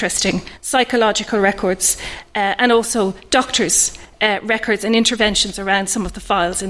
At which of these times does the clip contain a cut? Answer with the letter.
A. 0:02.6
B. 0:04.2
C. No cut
C